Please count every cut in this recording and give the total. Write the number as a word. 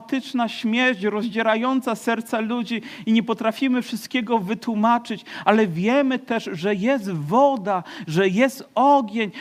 zero